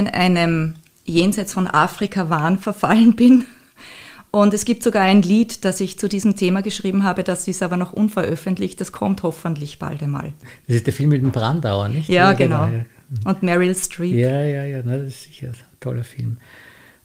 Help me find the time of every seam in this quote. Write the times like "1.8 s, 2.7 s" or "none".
none